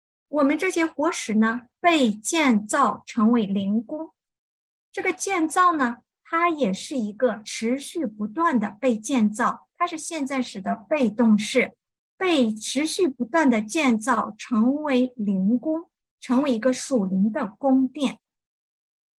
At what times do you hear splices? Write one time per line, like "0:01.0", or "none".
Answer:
none